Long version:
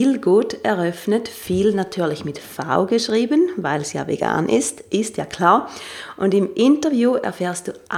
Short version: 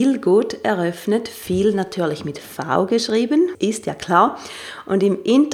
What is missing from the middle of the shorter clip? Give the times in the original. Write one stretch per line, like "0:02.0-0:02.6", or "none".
0:03.5-0:04.9